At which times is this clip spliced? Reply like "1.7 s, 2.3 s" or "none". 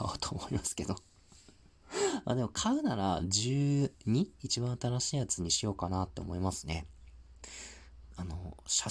none